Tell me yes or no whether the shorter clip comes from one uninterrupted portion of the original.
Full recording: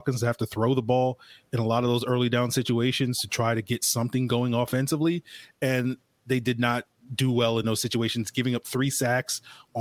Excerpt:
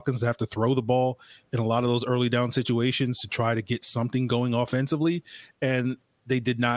yes